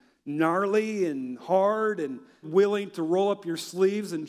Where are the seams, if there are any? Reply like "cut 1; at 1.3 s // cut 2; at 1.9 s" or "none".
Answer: cut 1; at 2.4 s